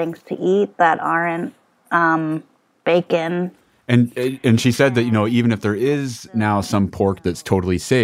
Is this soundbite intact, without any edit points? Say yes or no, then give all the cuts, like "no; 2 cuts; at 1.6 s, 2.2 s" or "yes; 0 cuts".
yes; 0 cuts